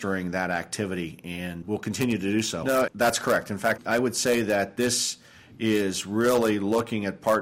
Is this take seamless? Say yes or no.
no